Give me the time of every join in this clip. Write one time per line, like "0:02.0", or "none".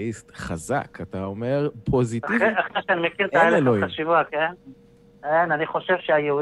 none